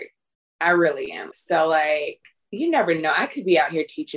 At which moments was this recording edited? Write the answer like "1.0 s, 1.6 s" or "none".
1.3 s